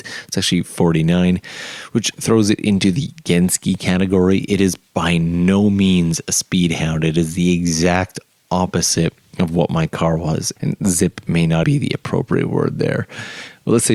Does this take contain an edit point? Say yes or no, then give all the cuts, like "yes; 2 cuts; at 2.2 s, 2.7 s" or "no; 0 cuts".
yes; 2 cuts; at 10.6 s, 11.6 s